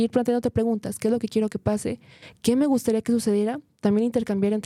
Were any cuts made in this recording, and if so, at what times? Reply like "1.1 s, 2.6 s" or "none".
none